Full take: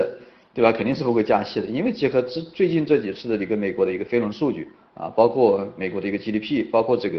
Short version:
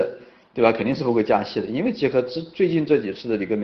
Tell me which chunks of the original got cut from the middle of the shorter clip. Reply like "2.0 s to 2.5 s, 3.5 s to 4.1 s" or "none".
none